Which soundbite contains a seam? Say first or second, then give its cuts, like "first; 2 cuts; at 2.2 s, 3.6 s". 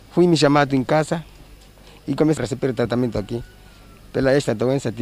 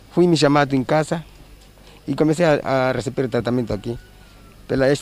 first; 1 cut; at 2.4 s